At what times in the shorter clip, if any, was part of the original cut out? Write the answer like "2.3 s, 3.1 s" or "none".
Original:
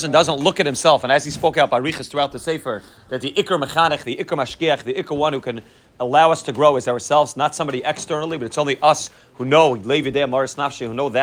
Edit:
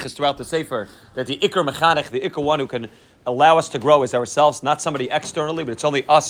2.1 s